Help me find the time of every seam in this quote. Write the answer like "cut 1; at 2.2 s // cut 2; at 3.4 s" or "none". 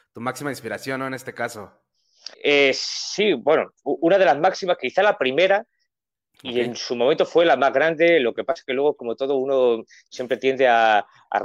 cut 1; at 2.3 s